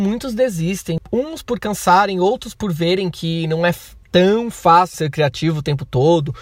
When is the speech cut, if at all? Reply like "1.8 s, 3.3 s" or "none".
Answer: 4.9 s